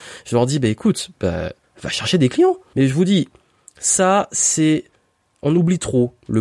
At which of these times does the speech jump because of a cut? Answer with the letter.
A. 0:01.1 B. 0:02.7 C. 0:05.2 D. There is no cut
B